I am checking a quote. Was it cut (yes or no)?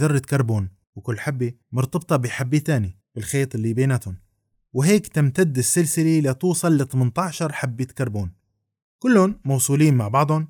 no